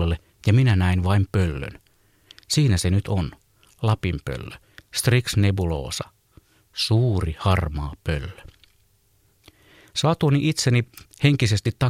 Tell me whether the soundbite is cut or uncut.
uncut